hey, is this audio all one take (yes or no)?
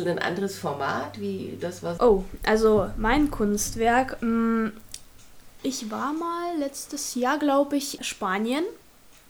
no